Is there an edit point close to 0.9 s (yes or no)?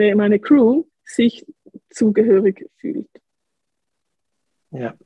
yes